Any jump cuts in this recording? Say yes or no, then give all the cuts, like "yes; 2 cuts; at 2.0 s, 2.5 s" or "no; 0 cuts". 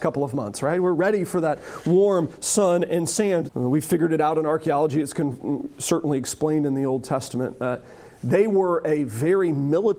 yes; 1 cut; at 3.5 s